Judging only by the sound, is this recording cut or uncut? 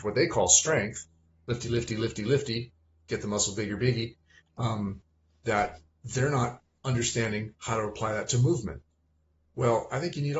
uncut